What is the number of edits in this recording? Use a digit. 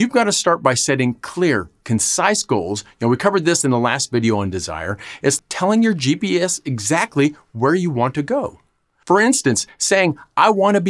2